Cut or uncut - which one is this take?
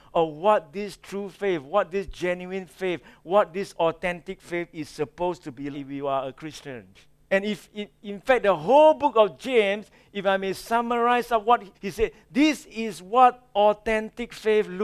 cut